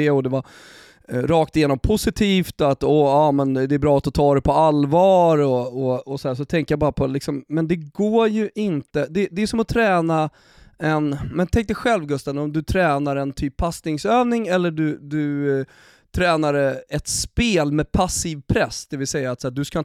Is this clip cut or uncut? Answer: uncut